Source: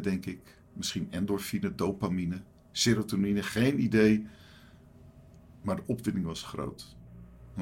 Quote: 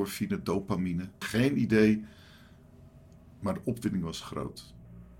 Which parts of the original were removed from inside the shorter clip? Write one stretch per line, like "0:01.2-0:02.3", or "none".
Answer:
0:02.5-0:03.4